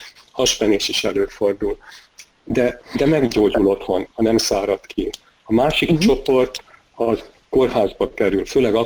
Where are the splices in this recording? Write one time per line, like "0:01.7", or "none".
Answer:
0:04.1